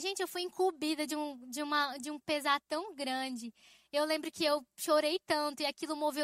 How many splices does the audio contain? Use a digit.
0